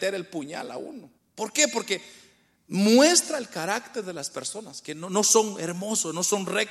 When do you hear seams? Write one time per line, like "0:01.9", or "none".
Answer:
0:01.2